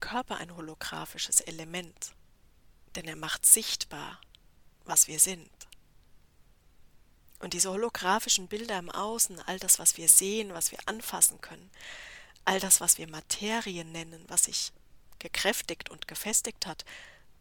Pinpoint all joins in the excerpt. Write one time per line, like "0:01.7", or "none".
none